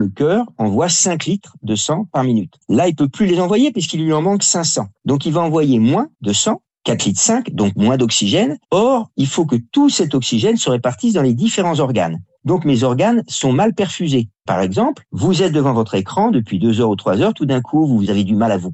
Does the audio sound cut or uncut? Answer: uncut